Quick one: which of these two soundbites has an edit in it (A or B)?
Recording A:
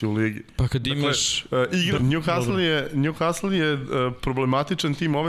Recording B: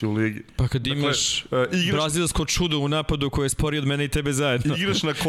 A